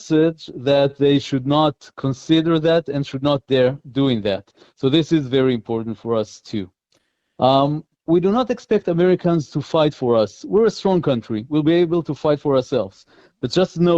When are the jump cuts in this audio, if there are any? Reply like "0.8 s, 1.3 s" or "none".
none